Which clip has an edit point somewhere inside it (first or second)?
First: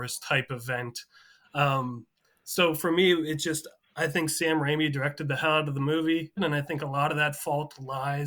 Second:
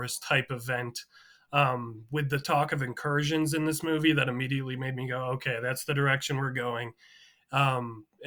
first